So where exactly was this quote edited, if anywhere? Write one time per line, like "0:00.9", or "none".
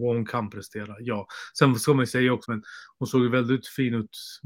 0:02.4